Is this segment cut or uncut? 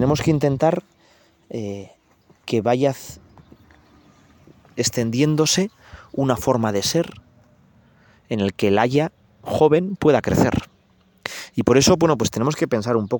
uncut